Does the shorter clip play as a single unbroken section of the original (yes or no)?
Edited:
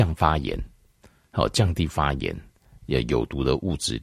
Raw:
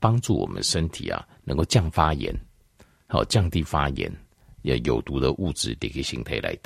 yes